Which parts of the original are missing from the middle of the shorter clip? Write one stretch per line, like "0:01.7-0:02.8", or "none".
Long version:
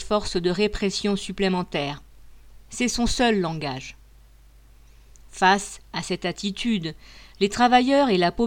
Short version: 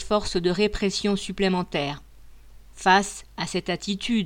0:02.7-0:05.2